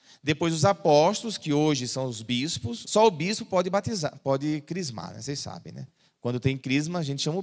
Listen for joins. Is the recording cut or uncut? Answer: cut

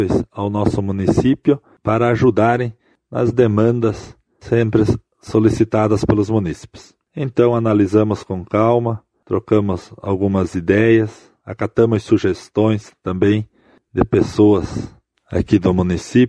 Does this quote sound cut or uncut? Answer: cut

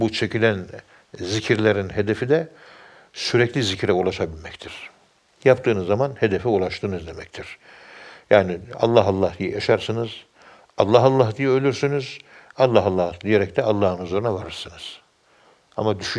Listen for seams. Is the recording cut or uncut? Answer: uncut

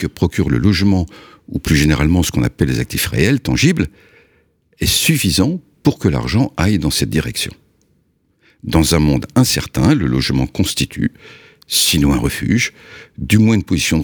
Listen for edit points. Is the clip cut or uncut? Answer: uncut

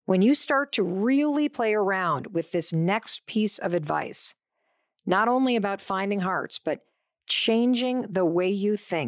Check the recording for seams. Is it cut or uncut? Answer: uncut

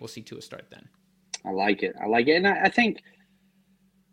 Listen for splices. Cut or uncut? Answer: uncut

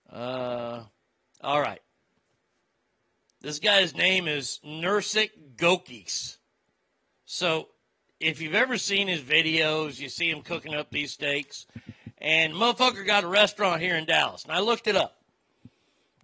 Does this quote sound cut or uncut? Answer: uncut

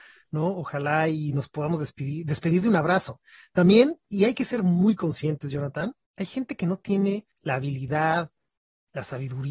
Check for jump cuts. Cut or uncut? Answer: cut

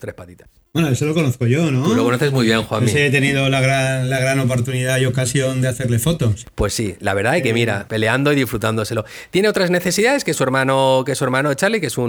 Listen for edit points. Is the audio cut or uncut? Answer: cut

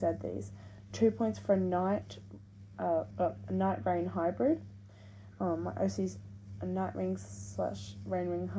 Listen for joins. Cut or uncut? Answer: cut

